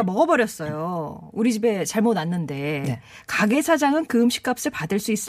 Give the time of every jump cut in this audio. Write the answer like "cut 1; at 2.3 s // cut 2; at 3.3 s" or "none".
none